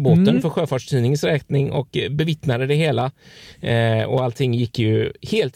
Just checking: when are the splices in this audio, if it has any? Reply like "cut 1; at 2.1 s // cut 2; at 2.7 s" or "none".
none